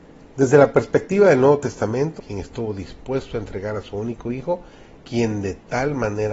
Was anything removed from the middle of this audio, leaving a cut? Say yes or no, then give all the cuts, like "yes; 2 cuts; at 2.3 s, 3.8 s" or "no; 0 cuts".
yes; 2 cuts; at 2.2 s, 5.0 s